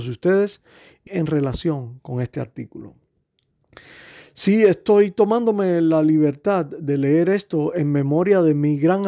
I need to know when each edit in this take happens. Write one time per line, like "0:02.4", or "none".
0:01.1